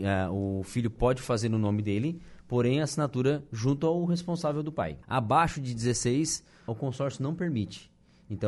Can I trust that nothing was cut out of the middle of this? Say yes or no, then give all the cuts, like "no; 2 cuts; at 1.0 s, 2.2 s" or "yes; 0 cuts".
no; 2 cuts; at 5.0 s, 6.7 s